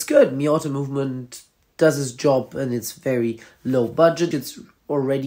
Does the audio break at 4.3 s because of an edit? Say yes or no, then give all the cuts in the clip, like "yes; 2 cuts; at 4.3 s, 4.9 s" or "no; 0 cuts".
yes; 1 cut; at 4.3 s